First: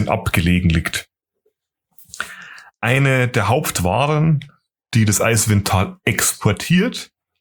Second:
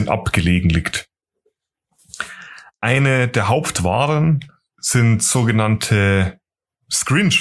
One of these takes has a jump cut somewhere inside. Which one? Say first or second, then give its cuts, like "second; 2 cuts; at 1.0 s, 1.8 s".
second; 1 cut; at 4.7 s